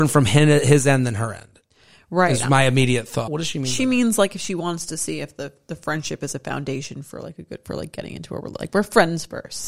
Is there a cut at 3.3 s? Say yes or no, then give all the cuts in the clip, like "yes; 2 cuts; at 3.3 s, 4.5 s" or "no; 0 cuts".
yes; 1 cut; at 3.3 s